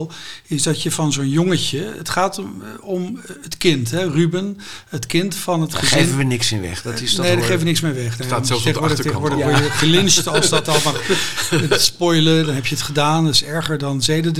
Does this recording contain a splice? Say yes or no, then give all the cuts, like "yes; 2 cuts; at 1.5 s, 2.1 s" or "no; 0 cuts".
no; 0 cuts